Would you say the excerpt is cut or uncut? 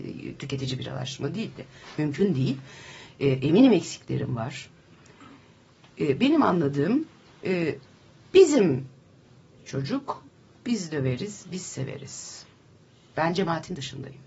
uncut